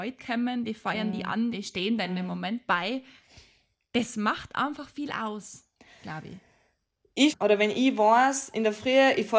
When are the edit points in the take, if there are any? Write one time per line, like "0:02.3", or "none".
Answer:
0:01.5
0:07.3